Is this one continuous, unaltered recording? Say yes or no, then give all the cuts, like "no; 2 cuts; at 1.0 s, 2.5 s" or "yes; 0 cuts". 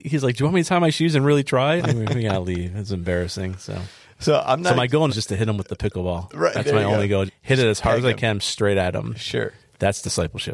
no; 3 cuts; at 1.8 s, 5.1 s, 7.3 s